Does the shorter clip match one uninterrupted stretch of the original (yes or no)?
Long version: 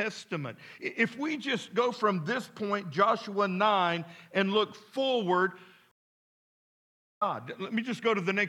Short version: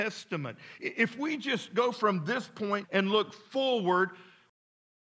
no